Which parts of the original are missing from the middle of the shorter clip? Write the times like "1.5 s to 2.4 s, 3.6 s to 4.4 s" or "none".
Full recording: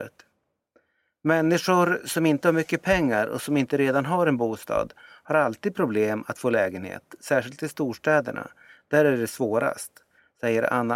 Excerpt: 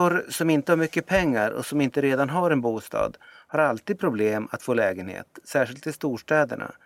none